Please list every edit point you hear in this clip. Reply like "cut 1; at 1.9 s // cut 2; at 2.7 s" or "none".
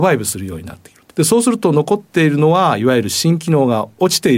cut 1; at 1.1 s

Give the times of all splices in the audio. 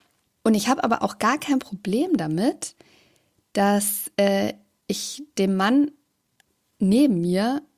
none

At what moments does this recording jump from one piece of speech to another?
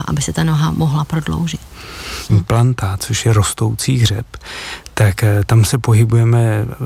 cut 1; at 2.3 s

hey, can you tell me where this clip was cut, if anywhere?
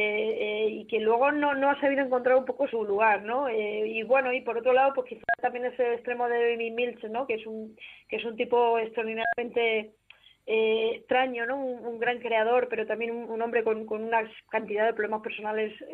cut 1; at 2.7 s // cut 2; at 10.9 s

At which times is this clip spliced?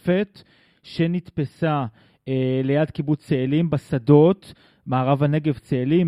none

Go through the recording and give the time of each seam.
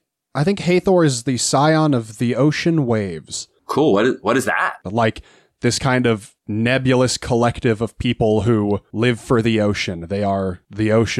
cut 1; at 4.8 s

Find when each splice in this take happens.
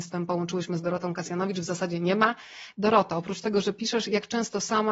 cut 1; at 2.7 s

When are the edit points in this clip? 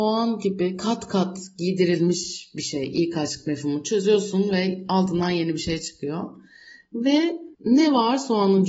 cut 1; at 7.5 s

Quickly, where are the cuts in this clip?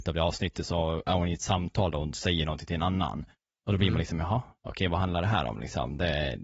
none

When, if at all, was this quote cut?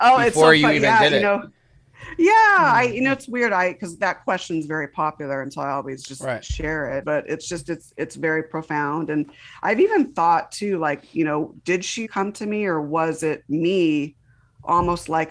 cut 1; at 7.0 s // cut 2; at 12.0 s

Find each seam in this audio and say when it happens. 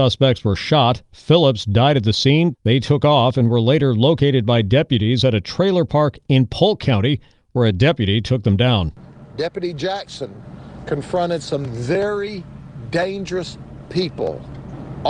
cut 1; at 2.5 s

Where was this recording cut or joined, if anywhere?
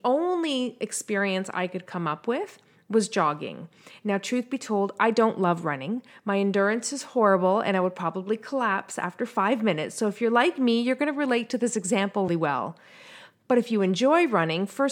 cut 1; at 12.3 s

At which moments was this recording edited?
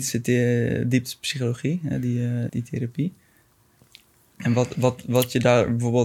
cut 1; at 2.5 s

